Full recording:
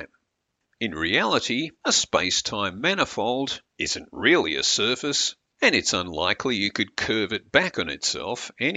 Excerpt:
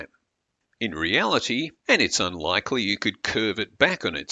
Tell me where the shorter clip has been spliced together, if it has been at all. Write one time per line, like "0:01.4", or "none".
0:01.8